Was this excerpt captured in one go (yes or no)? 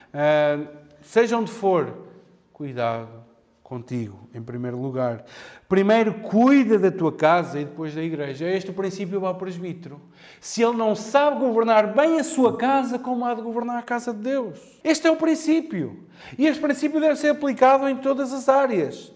no